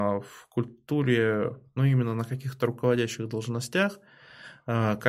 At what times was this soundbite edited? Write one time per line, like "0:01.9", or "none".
0:01.8